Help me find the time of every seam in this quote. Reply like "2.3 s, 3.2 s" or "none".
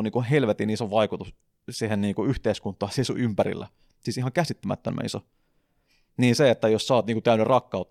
none